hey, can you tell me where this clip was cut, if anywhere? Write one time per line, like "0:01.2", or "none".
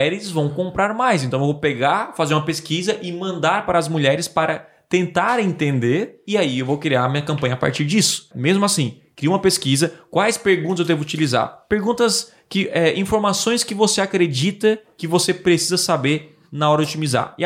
0:08.3